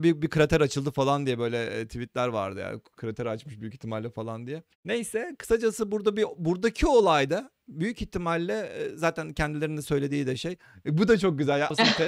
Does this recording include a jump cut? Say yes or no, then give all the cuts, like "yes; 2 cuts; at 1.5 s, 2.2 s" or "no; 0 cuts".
yes; 1 cut; at 4.7 s